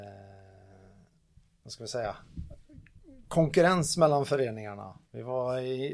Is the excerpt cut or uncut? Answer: uncut